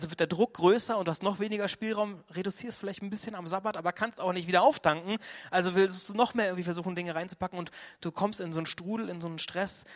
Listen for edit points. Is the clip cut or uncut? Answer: uncut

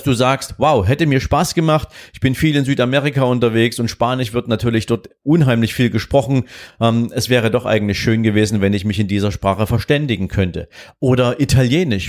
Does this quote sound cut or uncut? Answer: uncut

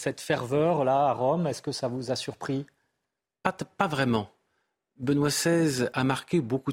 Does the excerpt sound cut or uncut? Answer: uncut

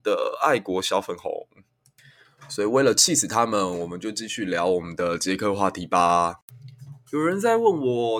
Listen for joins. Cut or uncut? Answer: uncut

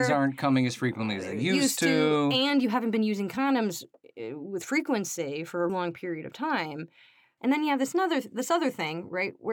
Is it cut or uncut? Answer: cut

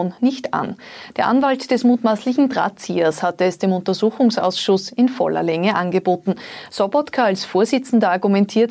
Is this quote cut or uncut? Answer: uncut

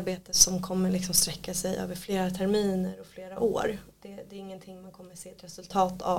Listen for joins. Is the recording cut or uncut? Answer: uncut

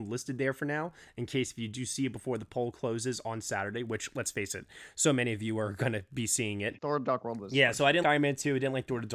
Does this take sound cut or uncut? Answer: cut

